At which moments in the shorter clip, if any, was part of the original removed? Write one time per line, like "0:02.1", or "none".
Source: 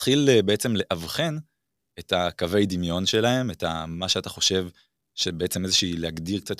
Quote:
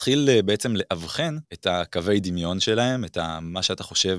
0:01.4